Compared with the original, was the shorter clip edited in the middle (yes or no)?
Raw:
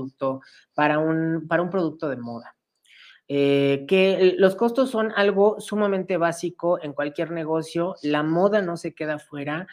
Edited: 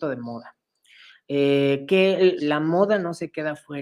yes